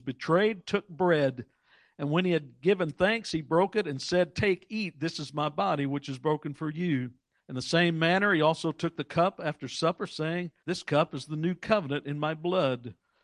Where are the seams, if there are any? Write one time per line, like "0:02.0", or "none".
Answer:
0:07.4
0:10.6